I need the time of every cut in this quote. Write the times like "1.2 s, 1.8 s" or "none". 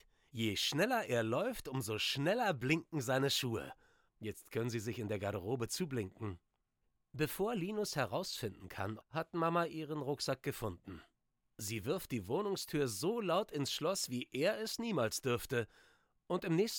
4.1 s, 9.0 s